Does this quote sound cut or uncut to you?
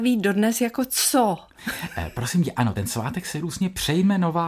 uncut